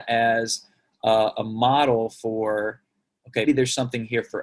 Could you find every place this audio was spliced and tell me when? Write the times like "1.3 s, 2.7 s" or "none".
3.5 s